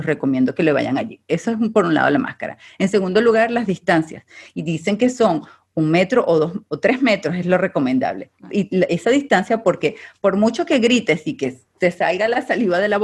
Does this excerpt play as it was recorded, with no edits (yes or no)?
yes